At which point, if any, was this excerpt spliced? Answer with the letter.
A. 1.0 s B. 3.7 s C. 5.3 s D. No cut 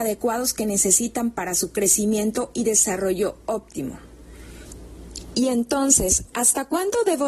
C